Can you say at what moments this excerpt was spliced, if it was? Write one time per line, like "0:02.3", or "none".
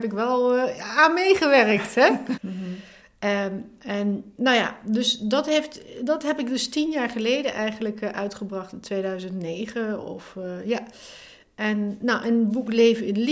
0:02.4